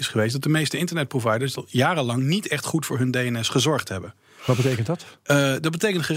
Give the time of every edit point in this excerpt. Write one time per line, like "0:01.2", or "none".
none